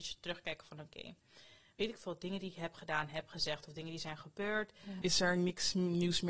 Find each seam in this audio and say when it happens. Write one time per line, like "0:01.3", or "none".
0:05.0